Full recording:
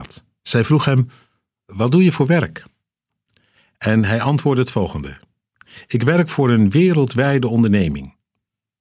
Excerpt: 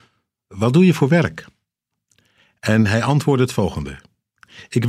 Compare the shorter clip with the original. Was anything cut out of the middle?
no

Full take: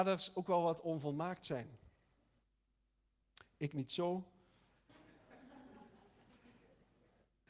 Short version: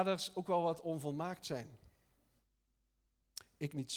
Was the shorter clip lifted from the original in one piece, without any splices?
yes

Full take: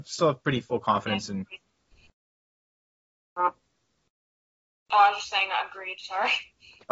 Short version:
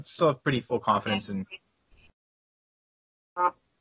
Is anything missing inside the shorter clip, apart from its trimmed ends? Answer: no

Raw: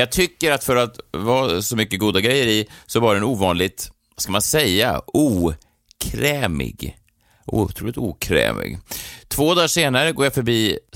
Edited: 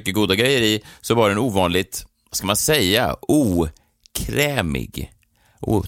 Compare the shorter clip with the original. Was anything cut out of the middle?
no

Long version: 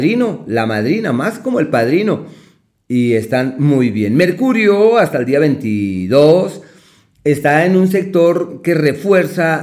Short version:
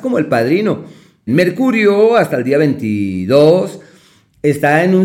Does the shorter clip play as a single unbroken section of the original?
no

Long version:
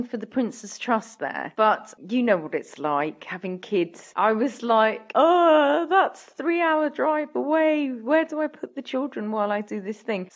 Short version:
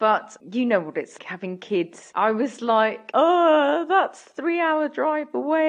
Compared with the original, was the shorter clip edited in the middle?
yes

